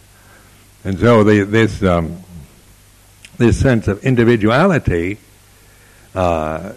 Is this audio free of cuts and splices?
yes; 0 cuts

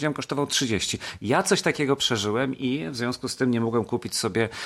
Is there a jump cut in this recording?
yes; 1 cut; at 1.2 s

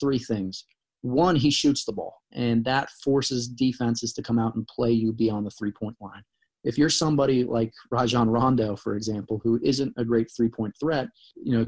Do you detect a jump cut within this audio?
no; 0 cuts

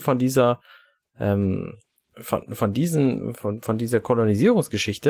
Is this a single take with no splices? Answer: yes; 0 cuts

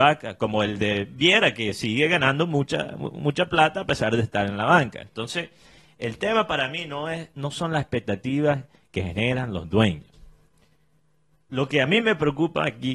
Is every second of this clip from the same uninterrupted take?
yes; 0 cuts

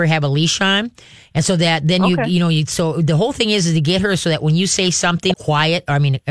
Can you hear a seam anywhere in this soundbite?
yes; 1 cut; at 5.3 s

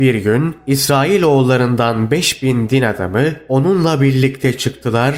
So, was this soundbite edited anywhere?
no; 0 cuts

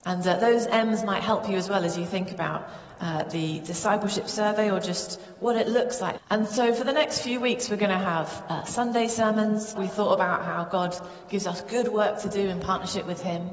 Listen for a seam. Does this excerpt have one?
yes; 2 cuts; at 6.2 s, 9.8 s

